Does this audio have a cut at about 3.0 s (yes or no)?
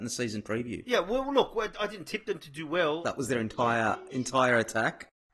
yes